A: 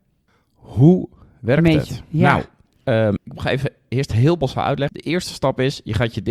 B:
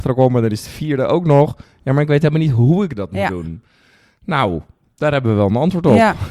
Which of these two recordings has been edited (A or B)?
A